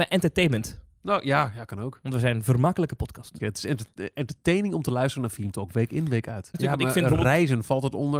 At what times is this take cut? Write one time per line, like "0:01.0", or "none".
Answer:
0:03.4
0:06.5